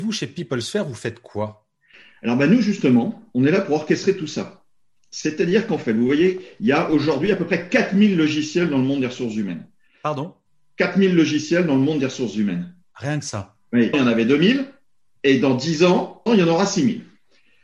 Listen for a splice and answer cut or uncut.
cut